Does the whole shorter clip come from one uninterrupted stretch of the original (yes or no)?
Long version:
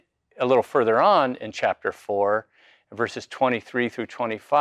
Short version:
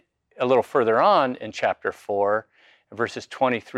yes